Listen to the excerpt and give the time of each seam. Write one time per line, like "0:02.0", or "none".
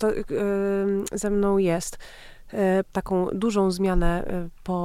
0:02.8